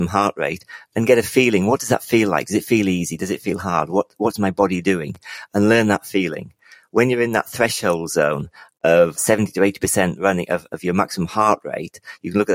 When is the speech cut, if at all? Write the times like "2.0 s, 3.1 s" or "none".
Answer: 9.2 s